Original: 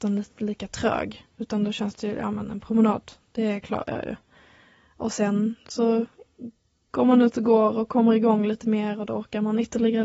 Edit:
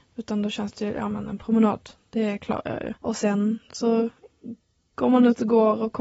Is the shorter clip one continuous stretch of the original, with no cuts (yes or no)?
no